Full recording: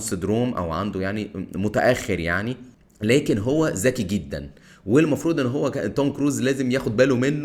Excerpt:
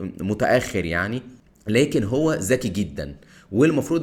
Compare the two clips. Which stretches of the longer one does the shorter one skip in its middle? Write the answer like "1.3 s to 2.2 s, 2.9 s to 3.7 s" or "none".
none